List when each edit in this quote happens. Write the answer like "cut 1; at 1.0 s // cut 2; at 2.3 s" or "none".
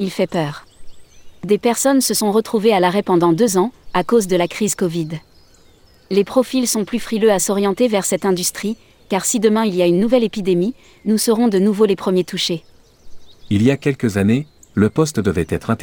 none